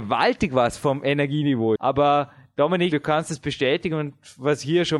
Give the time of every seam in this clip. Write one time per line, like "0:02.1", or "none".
0:01.8
0:02.9

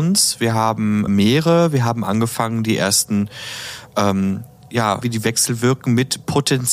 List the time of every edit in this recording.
0:01.1
0:05.0

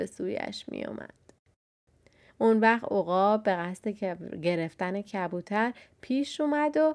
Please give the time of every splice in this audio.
0:02.3

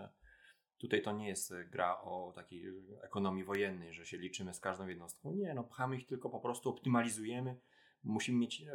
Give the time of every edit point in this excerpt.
none

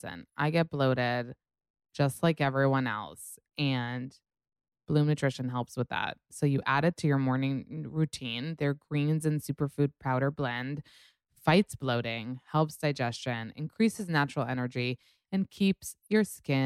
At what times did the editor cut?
none

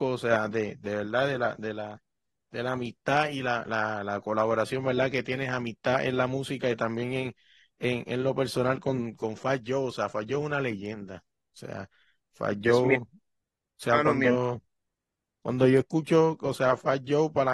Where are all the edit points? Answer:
none

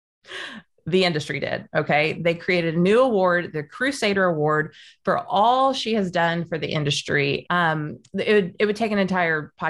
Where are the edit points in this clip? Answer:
0:07.5

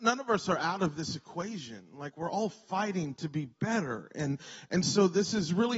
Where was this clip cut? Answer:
none

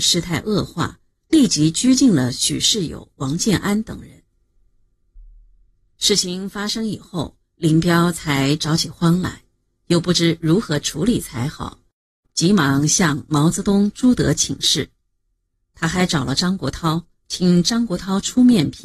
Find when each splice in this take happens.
none

